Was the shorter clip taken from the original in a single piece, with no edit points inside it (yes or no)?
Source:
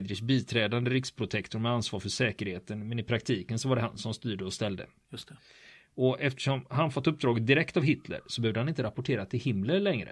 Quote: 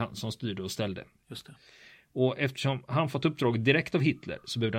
yes